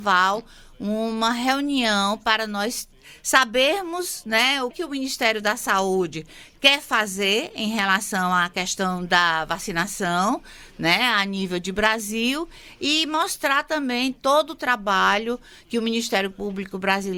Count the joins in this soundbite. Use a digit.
1